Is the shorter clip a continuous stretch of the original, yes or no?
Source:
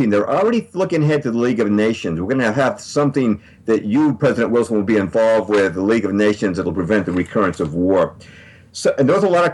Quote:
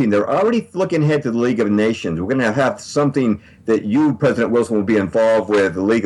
yes